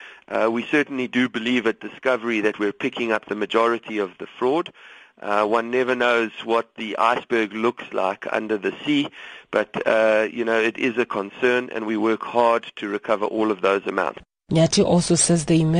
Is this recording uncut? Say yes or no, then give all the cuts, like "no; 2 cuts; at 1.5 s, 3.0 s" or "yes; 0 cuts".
yes; 0 cuts